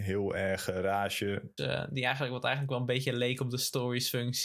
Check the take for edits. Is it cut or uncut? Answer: cut